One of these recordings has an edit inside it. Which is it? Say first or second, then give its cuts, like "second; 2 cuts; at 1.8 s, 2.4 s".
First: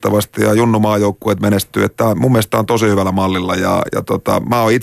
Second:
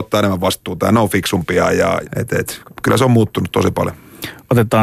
second; 1 cut; at 2.0 s